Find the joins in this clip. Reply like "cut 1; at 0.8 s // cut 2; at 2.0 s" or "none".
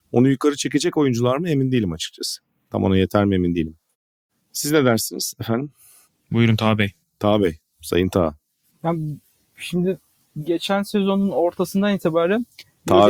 none

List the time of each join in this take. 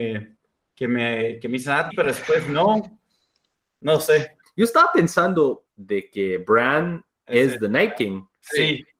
cut 1; at 1.9 s // cut 2; at 4.4 s // cut 3; at 5.7 s

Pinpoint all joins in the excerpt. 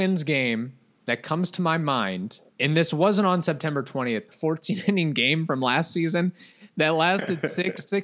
cut 1; at 2.5 s // cut 2; at 4.3 s

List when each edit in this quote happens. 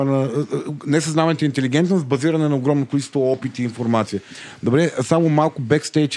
none

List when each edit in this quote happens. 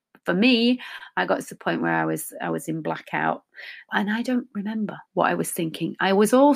cut 1; at 3.9 s // cut 2; at 5.1 s

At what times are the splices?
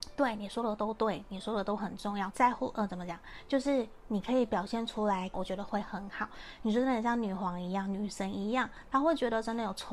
cut 1; at 2.3 s // cut 2; at 5.3 s // cut 3; at 6.6 s

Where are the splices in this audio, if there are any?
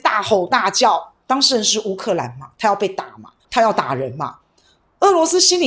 cut 1; at 1.2 s // cut 2; at 3.4 s

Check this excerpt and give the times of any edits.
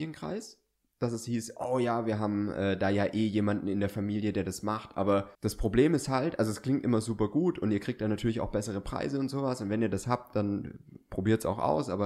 cut 1; at 5.3 s

